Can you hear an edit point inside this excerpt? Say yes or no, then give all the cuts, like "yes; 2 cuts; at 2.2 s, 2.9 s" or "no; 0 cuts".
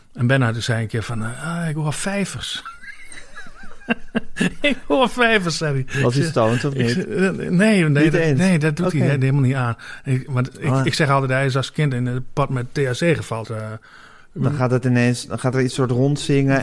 yes; 1 cut; at 13.4 s